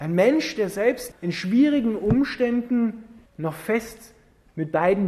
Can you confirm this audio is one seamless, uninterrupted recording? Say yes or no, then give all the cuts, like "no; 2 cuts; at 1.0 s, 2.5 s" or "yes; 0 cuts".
no; 2 cuts; at 1.1 s, 3.3 s